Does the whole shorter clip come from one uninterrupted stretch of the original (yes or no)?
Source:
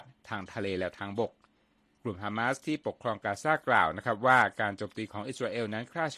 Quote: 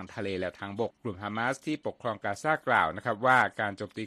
no